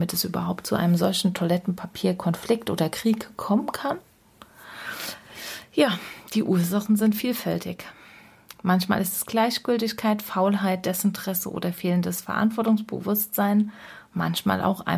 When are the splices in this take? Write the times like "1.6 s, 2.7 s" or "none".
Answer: none